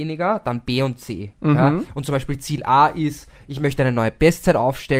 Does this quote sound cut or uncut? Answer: uncut